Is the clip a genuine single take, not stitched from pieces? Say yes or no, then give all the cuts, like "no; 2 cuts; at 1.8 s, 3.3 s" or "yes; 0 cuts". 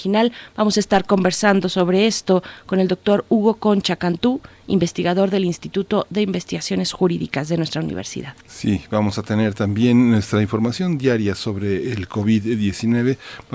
no; 1 cut; at 8.4 s